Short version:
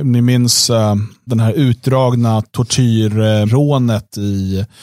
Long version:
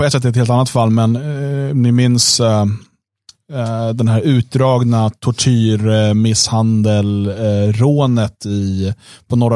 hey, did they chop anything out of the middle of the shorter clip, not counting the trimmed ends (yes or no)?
yes